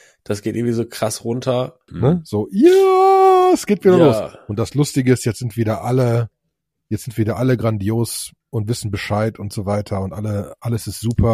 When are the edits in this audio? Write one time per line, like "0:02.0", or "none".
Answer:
0:01.9